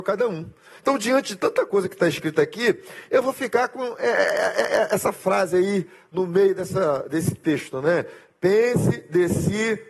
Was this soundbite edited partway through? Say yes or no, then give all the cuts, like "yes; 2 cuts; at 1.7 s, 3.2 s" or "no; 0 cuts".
no; 0 cuts